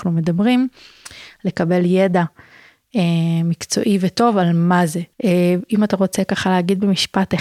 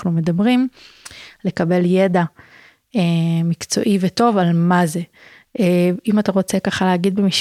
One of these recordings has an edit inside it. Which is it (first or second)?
first